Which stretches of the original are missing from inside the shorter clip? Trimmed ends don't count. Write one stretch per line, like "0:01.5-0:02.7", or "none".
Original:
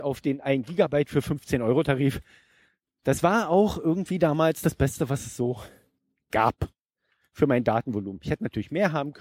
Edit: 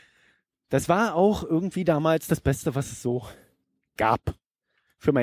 none